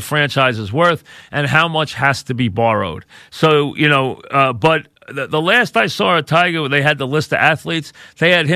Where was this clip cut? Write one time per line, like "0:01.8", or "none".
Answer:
none